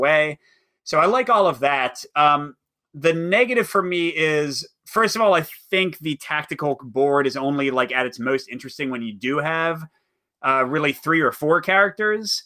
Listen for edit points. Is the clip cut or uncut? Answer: uncut